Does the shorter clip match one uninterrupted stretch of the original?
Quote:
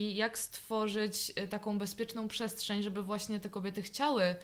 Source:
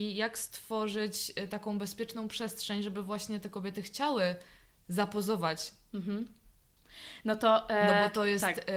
yes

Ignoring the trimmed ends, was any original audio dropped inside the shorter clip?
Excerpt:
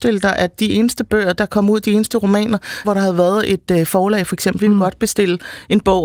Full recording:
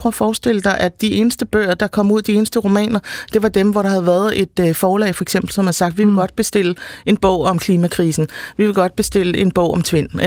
yes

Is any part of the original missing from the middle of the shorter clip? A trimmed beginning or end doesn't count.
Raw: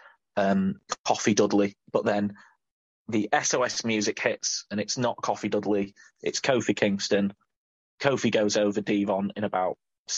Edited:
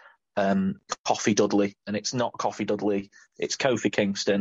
yes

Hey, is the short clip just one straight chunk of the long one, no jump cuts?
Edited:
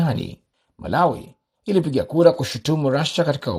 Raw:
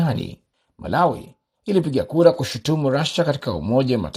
yes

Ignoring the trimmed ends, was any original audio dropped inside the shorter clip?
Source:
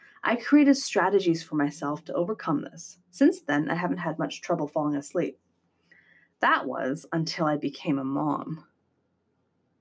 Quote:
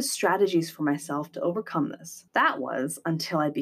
yes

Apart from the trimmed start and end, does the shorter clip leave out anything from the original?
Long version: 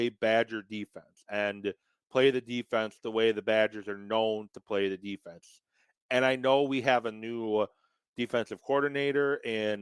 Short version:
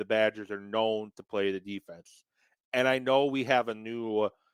no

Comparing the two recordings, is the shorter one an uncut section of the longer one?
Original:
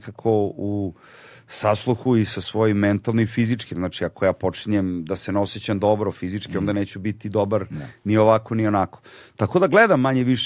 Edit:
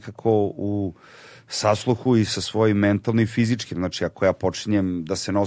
yes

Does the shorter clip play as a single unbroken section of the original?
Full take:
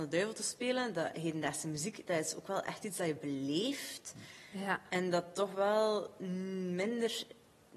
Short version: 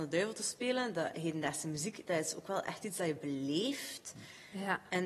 yes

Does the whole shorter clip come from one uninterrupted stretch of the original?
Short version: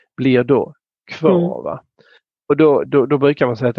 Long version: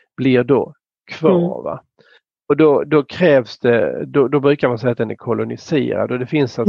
no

